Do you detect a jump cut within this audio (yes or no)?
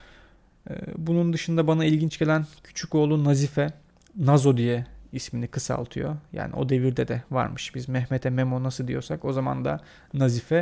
no